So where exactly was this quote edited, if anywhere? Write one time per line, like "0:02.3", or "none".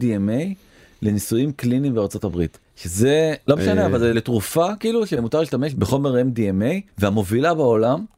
0:03.5
0:06.9